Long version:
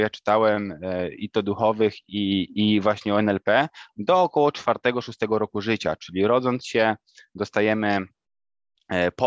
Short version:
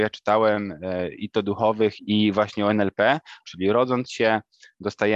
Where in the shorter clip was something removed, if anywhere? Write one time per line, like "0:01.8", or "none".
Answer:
0:02.0
0:03.4